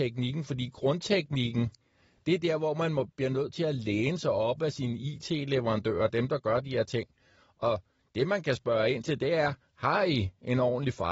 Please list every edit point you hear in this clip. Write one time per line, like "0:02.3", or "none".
none

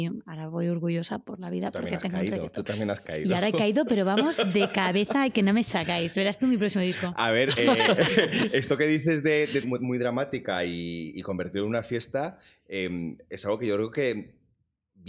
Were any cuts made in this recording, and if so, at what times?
0:09.6

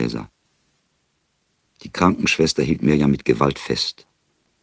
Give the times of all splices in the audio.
0:01.6

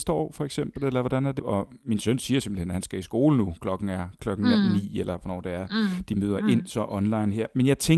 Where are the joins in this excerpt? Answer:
0:01.4

